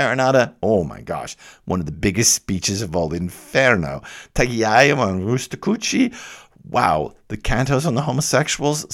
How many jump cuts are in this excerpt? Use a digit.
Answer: 0